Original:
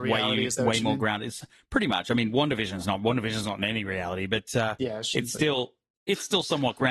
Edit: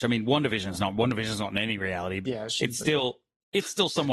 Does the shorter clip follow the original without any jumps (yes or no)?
no